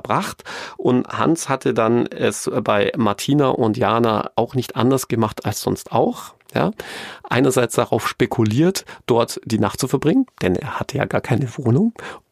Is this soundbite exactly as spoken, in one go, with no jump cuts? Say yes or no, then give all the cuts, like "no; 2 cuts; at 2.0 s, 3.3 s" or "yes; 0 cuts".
yes; 0 cuts